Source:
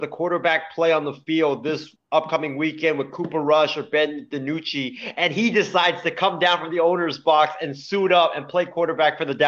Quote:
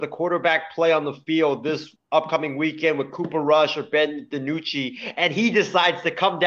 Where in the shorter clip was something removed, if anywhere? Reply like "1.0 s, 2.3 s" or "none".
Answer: none